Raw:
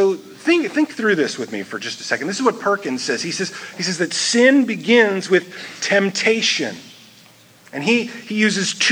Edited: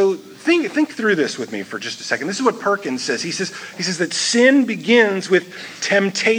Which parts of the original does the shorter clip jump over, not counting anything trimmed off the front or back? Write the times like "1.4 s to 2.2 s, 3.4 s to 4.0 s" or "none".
none

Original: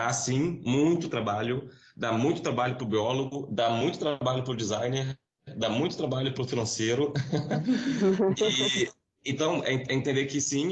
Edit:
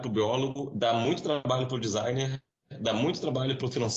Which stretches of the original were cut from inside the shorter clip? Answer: none

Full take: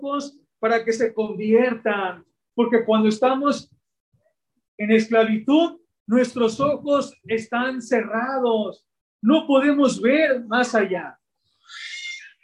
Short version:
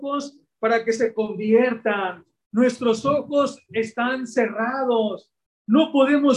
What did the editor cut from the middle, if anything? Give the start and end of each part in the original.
2.4 s to 6.0 s

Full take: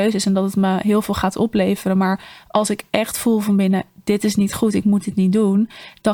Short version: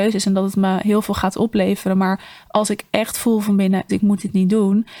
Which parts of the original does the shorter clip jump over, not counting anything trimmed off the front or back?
3.9 s to 4.7 s

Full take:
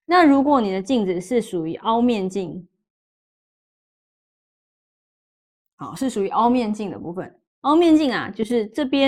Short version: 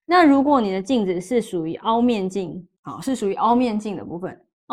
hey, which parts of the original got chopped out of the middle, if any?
2.8 s to 5.7 s

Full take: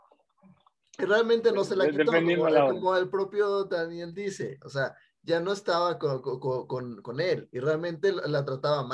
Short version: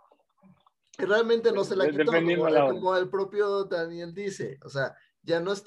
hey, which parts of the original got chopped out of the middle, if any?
none

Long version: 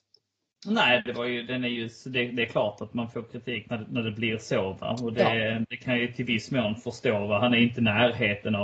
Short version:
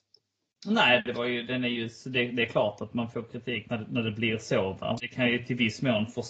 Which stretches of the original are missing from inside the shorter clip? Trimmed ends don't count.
5.0 s to 5.7 s

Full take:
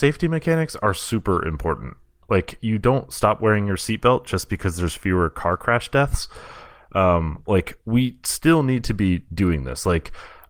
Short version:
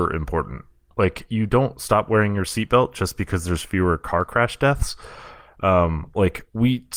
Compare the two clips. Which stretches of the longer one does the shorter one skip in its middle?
none

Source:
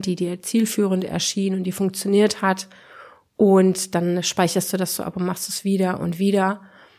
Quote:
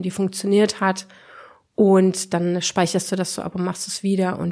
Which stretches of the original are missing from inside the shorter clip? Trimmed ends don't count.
none

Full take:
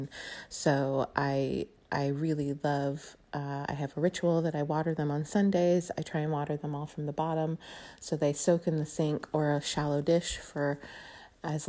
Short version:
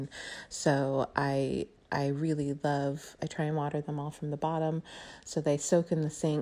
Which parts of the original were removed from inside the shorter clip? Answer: 3.2 s to 5.9 s

